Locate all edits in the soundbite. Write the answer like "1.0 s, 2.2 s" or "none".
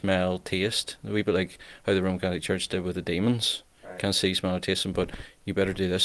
none